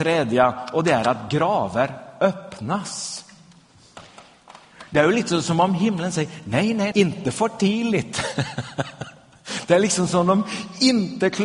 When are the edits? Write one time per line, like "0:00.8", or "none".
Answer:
0:06.9